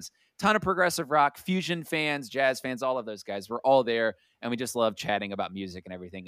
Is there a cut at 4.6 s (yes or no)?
no